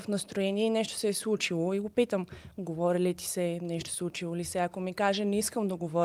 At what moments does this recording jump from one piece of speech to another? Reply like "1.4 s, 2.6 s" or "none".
none